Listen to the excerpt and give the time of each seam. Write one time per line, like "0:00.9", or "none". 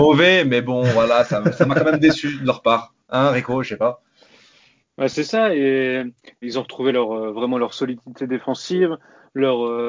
0:04.8
0:06.4